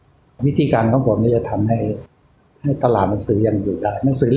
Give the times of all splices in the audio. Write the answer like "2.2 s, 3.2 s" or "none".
none